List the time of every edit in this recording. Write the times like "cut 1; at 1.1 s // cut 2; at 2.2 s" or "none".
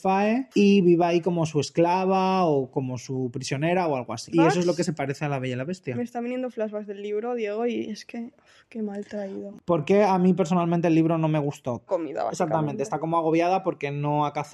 cut 1; at 4.3 s // cut 2; at 11.9 s

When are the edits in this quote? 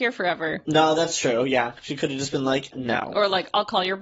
cut 1; at 2.7 s

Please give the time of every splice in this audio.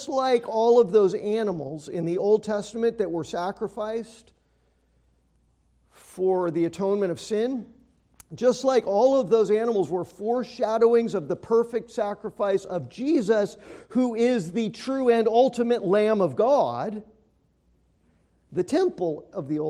none

